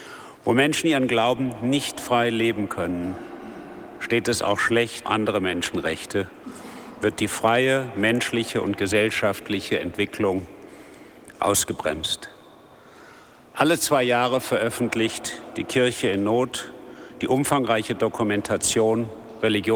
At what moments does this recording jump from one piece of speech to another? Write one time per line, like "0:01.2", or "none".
0:05.0